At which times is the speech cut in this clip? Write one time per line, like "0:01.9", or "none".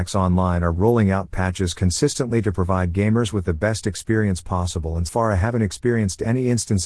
0:05.1